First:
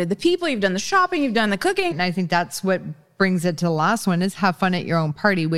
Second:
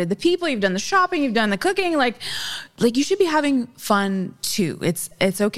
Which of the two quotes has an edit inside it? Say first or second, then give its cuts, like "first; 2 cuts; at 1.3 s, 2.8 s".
first; 1 cut; at 1.9 s